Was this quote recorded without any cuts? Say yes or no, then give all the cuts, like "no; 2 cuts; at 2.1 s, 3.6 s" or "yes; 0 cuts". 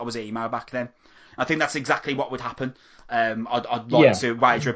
yes; 0 cuts